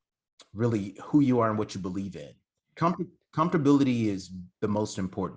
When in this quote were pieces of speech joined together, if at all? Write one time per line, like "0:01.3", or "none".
0:02.8